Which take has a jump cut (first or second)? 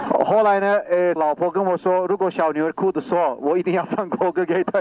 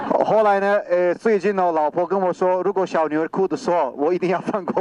first